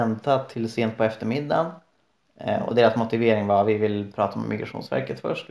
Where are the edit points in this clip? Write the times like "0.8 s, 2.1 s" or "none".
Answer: none